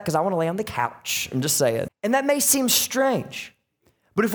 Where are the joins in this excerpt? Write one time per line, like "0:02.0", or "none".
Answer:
0:01.9